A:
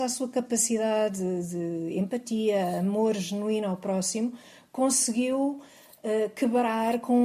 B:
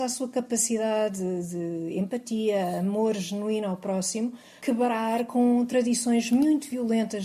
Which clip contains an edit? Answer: B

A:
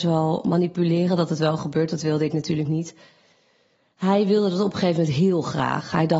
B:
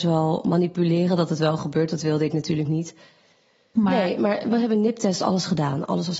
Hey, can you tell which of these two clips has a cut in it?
B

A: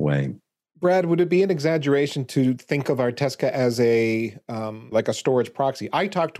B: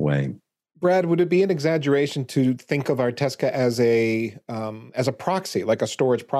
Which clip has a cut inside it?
A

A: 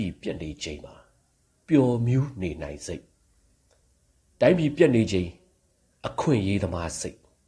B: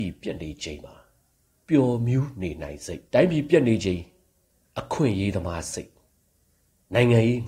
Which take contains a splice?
B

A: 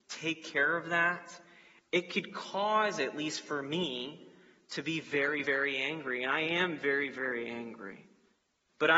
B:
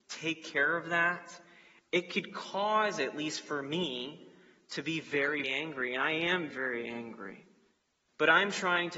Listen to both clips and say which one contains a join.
B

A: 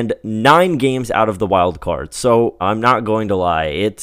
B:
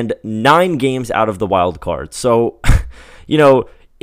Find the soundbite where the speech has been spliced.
A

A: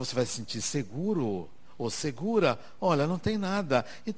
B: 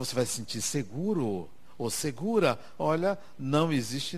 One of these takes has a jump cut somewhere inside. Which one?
B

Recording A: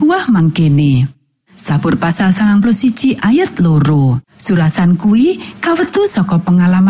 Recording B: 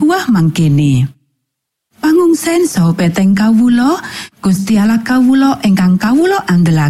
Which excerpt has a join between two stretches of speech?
A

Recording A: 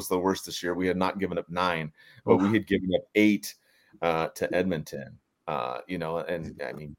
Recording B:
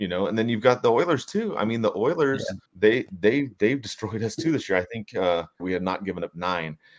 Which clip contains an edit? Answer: B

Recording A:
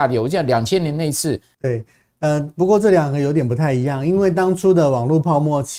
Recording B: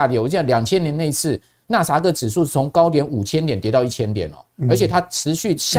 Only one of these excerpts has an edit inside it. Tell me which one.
A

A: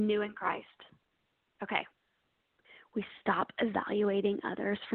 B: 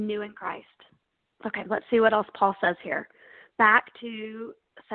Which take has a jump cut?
B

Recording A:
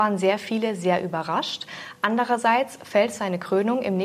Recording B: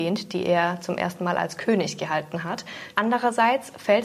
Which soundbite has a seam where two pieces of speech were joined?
B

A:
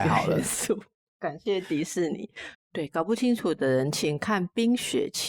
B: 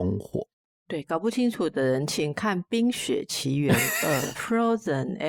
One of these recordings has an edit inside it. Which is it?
A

